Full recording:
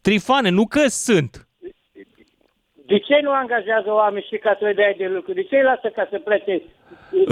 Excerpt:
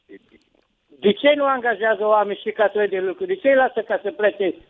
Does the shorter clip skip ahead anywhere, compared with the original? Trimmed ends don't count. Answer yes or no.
yes